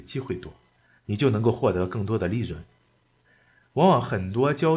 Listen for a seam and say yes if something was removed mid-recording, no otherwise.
no